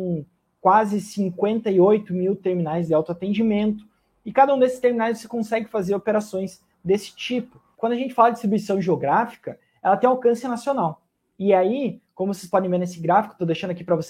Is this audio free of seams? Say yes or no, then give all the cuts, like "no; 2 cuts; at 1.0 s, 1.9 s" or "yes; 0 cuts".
no; 1 cut; at 7.7 s